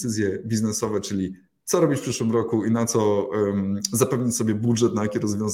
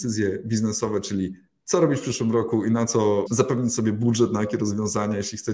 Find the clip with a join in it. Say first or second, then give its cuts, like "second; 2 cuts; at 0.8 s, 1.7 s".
second; 1 cut; at 3.3 s